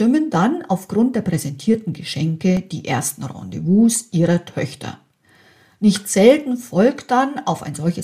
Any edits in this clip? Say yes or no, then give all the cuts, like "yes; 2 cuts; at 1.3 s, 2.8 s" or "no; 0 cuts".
no; 0 cuts